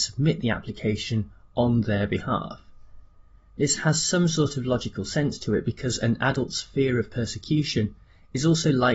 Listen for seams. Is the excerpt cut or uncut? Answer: cut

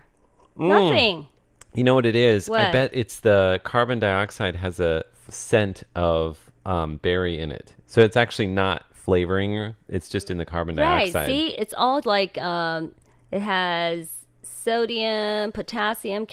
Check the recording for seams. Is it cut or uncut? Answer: cut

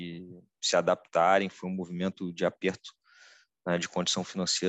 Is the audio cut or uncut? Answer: uncut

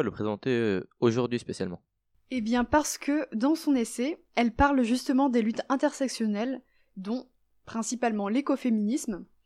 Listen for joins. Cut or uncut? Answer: uncut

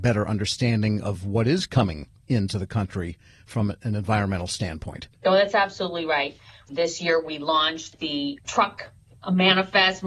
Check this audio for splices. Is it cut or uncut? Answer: cut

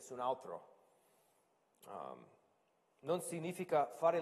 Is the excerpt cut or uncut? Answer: uncut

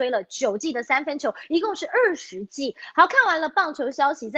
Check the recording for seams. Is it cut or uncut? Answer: cut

